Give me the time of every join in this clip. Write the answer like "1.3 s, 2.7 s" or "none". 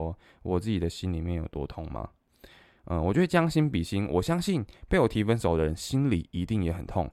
none